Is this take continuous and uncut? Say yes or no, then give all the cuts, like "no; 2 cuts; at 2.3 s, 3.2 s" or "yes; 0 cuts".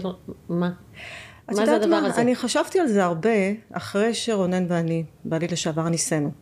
yes; 0 cuts